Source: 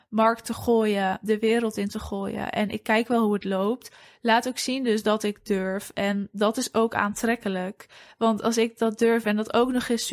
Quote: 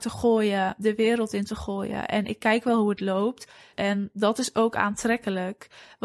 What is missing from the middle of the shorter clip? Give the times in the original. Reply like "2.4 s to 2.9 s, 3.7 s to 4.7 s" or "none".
4.2 s to 5.9 s